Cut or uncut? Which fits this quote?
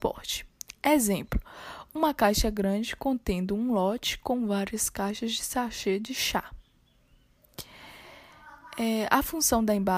uncut